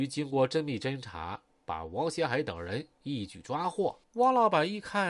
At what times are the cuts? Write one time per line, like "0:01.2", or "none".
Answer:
0:04.0

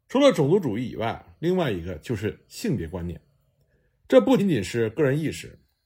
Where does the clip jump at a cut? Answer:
0:04.4

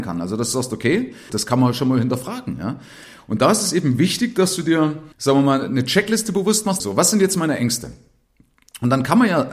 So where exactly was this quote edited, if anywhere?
0:01.3
0:05.1
0:06.8

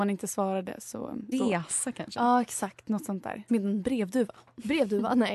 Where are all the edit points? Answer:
0:01.3
0:03.5

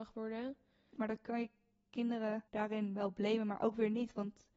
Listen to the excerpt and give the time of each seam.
0:01.0
0:02.5

